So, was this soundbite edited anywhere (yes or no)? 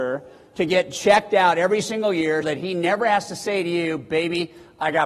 yes